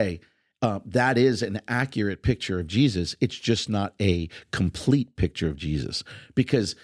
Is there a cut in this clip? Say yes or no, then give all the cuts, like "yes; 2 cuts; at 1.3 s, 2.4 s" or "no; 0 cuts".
no; 0 cuts